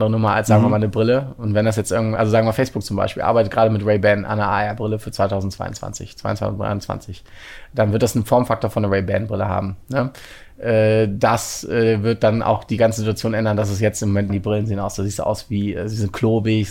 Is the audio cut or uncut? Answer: cut